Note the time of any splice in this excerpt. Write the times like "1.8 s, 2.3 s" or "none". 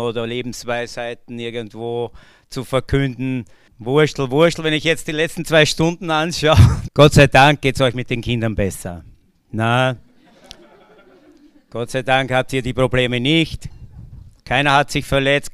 3.7 s, 6.9 s